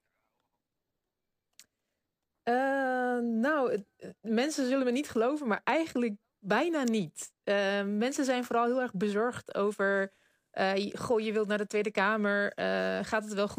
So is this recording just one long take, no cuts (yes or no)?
yes